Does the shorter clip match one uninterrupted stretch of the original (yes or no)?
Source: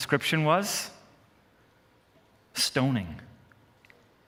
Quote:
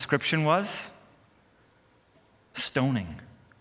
yes